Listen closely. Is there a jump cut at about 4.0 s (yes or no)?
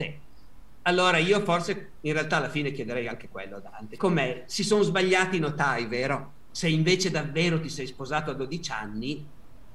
yes